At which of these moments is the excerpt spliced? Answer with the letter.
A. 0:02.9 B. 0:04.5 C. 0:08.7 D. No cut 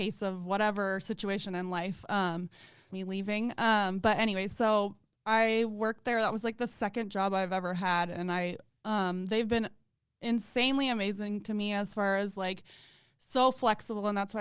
A